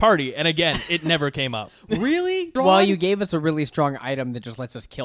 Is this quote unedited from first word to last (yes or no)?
no